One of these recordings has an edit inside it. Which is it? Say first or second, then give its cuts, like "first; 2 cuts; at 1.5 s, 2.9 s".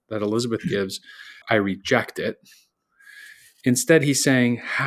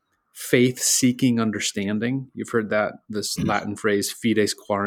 first; 1 cut; at 1.4 s